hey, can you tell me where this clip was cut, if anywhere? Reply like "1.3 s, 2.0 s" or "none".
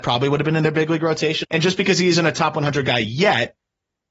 1.4 s